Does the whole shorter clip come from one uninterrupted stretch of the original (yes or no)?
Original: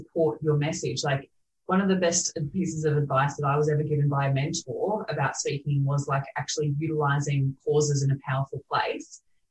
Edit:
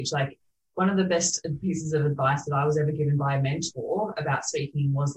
yes